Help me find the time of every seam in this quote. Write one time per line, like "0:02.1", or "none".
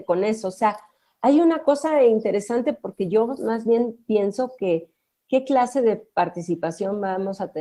none